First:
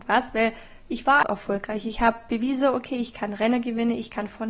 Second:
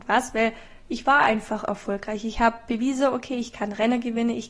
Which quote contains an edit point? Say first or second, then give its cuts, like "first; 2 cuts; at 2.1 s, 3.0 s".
first; 1 cut; at 1.2 s